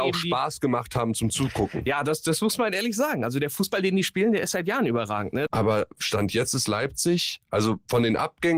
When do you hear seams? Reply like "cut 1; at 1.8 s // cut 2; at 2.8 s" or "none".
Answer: cut 1; at 5.5 s